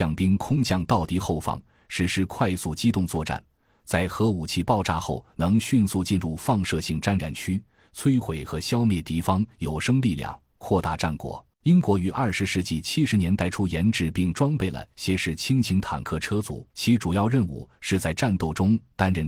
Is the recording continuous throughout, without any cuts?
no; 2 cuts; at 11.5 s, 16.7 s

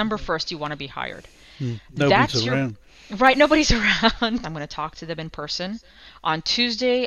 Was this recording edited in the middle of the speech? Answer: yes; 1 cut; at 4.4 s

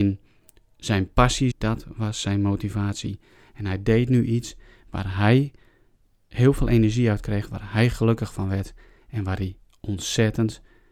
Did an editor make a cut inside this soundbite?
yes; 1 cut; at 1.5 s

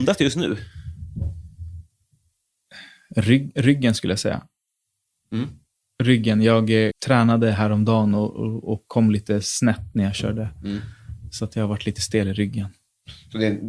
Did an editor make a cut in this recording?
yes; 1 cut; at 6.9 s

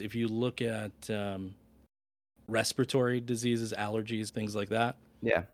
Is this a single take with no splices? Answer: no; 1 cut; at 4.3 s

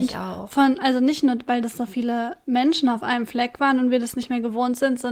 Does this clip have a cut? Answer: no; 0 cuts

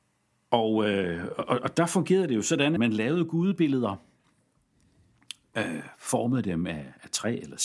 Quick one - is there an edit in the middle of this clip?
yes; 1 cut; at 2.8 s

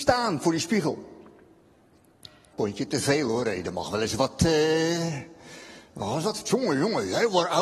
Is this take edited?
yes; 1 cut; at 2.5 s

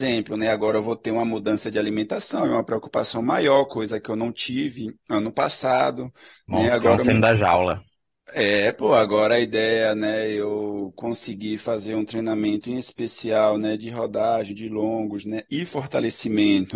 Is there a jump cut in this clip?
no; 0 cuts

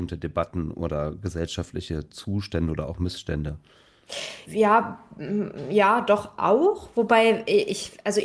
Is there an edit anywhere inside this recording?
no; 0 cuts

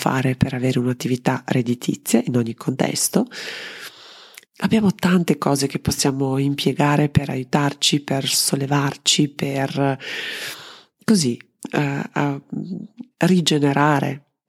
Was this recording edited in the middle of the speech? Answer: yes; 2 cuts; at 4.4 s, 13.1 s

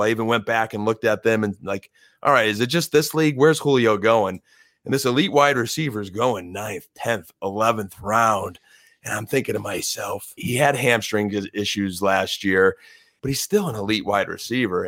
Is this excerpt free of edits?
no; 2 cuts; at 10.4 s, 13.2 s

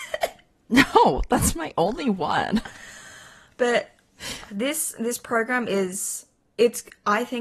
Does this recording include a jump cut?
yes; 1 cut; at 4.5 s

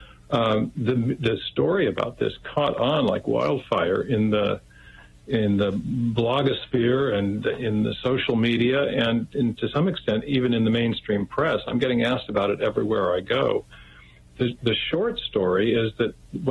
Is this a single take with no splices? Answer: yes; 0 cuts

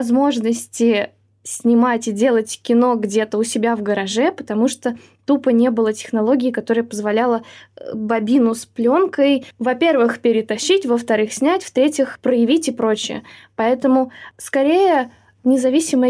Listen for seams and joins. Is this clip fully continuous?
yes; 0 cuts

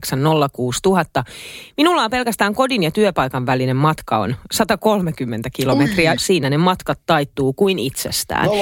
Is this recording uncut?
no; 1 cut; at 6.2 s

